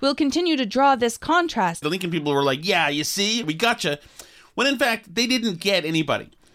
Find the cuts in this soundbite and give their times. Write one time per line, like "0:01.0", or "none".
0:01.8
0:03.4